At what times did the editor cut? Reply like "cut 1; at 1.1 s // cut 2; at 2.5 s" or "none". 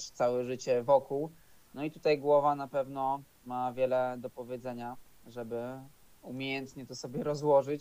cut 1; at 1.6 s